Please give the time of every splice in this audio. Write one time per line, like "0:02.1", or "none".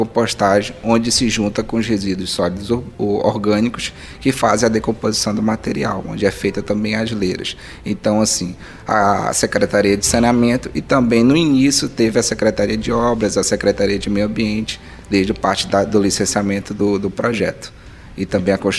none